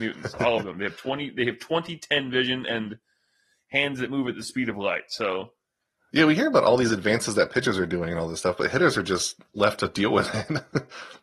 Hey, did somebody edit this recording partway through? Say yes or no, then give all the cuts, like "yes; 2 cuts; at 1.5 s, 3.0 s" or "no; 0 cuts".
no; 0 cuts